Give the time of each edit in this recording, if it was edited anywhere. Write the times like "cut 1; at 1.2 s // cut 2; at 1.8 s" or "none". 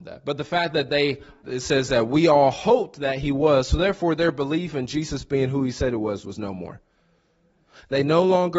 cut 1; at 1.4 s